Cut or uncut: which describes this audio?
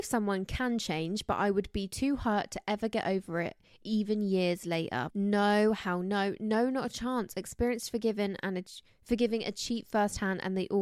cut